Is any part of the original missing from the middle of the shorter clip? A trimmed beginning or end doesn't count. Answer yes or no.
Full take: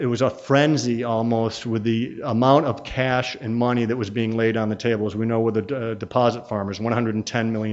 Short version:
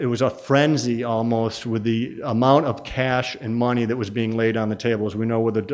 no